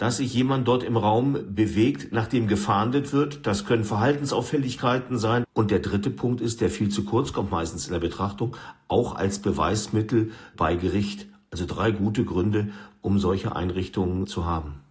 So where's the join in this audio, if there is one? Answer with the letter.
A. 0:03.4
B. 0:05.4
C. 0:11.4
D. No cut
B